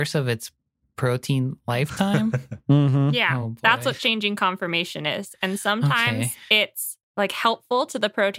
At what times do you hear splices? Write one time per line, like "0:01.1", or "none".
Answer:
none

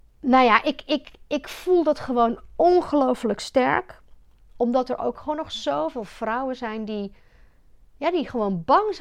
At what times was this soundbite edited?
0:04.5

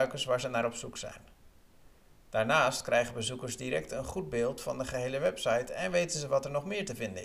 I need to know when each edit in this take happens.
none

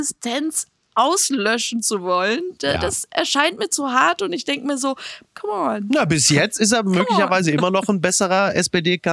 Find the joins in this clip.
none

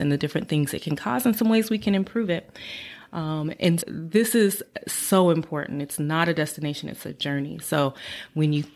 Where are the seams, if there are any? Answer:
0:03.8

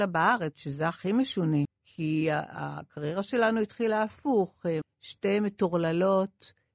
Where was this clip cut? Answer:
0:01.6
0:04.8

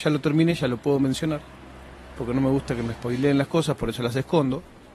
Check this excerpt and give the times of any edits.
none

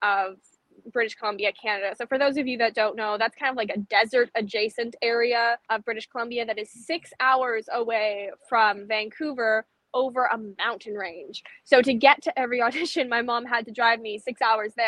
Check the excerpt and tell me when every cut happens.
0:05.7

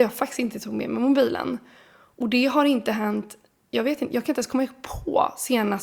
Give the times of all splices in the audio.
none

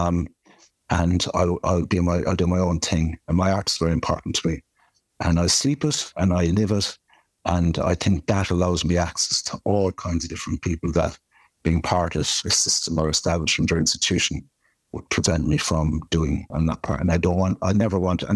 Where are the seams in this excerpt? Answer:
0:16.5

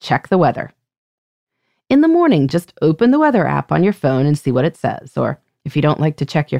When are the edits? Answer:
none

